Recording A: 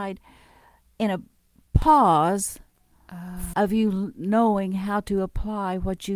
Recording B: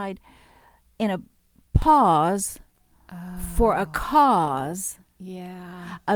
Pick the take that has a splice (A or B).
A